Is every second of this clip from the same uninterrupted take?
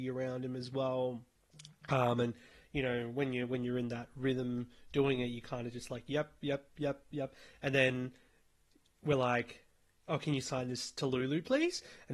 yes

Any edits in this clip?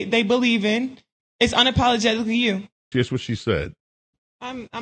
yes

